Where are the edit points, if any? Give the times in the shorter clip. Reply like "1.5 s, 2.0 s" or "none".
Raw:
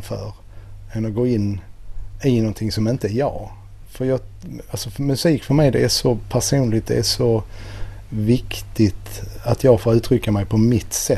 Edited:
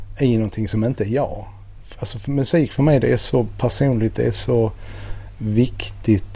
1.9 s